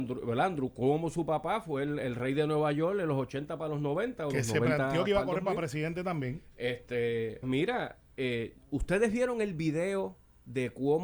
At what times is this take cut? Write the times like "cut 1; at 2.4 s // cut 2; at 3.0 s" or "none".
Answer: cut 1; at 7.4 s

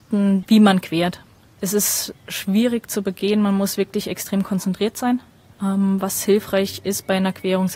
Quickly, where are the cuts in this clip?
none

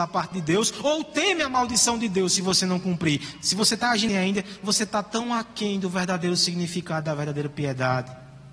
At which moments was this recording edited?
cut 1; at 4.1 s

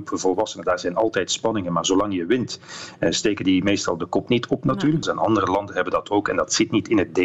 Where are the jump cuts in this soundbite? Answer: cut 1; at 5.0 s

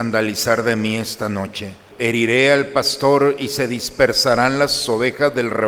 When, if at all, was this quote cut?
cut 1; at 1.9 s

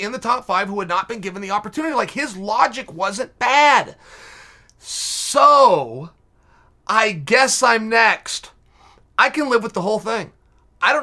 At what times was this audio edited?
none

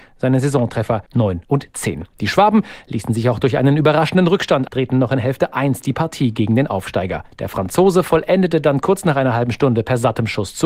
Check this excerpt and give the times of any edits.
cut 1; at 4.7 s

